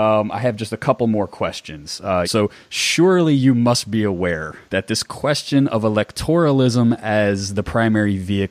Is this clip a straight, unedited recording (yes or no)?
no